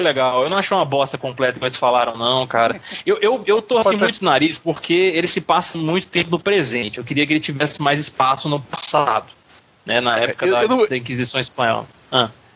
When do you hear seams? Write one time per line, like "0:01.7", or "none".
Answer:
none